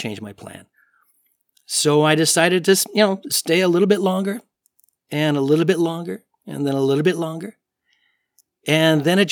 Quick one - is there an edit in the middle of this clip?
no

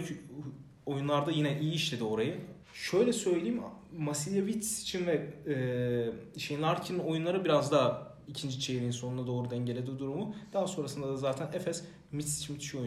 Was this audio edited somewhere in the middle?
yes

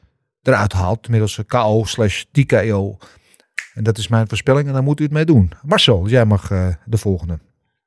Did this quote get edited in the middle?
no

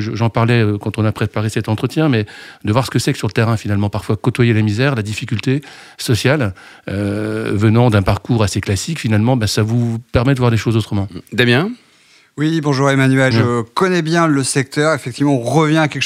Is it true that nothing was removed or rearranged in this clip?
no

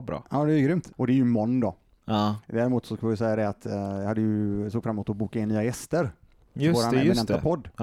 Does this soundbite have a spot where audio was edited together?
yes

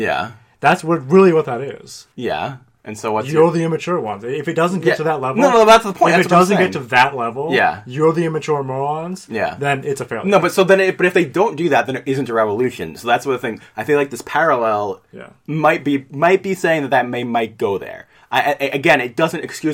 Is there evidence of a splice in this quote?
yes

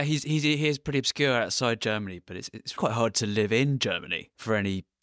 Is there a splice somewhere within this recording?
yes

